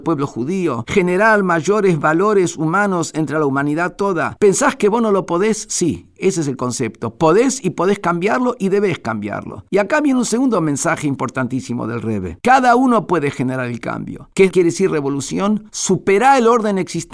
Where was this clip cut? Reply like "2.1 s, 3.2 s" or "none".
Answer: 12.4 s, 14.3 s